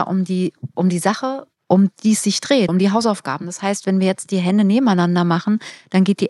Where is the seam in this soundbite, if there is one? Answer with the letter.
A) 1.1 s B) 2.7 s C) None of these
B